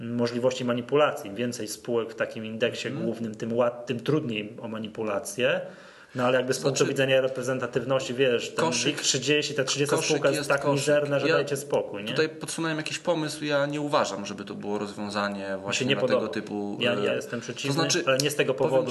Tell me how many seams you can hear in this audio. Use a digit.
0